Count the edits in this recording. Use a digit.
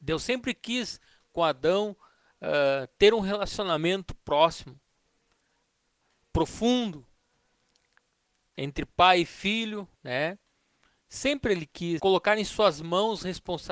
2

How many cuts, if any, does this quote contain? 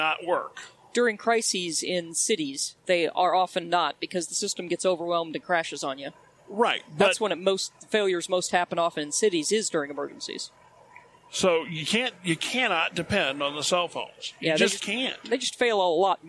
0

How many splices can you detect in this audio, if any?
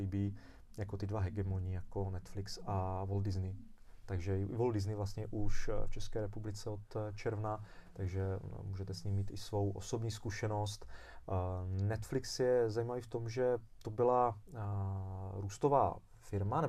0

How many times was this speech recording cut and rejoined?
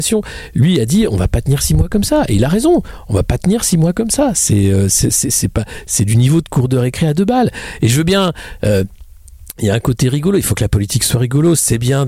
0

